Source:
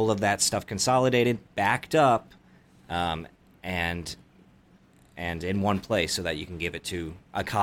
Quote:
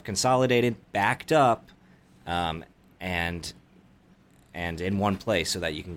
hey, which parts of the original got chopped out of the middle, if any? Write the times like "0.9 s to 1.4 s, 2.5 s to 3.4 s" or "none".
none